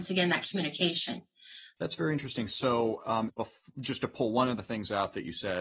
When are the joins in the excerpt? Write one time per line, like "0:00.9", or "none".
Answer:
0:01.8
0:03.3